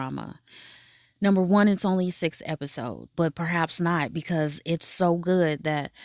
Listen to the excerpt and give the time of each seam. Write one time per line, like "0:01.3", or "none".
0:03.1

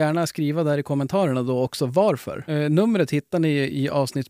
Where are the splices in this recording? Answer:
0:02.5

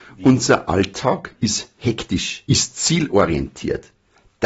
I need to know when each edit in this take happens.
0:02.5

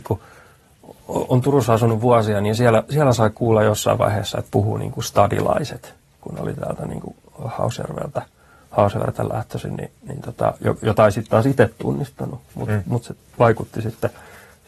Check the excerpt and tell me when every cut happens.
none

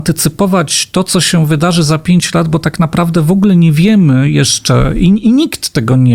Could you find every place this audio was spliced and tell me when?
none

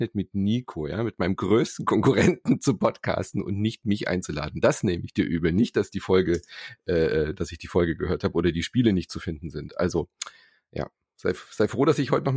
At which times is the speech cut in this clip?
none

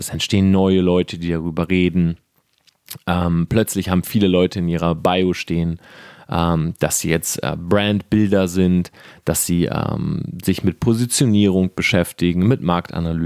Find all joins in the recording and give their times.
none

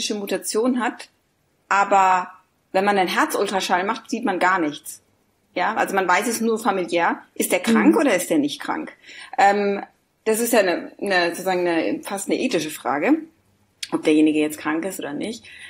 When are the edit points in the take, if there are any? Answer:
none

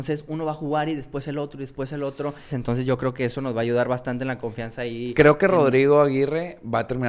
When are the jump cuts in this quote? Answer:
0:02.5

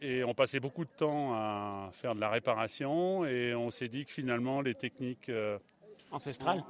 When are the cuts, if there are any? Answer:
none

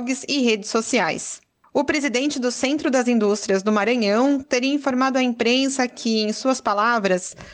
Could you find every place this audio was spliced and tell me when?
0:04.4

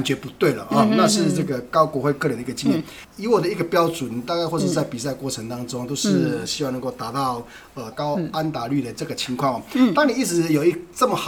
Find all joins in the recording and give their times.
0:03.0
0:07.9

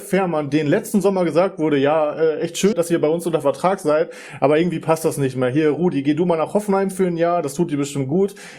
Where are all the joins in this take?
0:02.7

